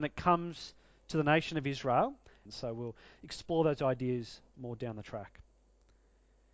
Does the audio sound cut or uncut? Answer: cut